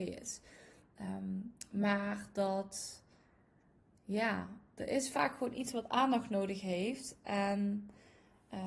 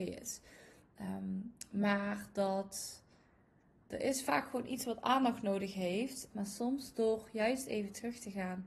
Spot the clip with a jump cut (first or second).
second